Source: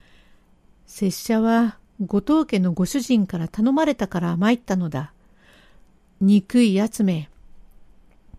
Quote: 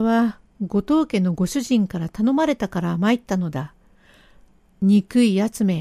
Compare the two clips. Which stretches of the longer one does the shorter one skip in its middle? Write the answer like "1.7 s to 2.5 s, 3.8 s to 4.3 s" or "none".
none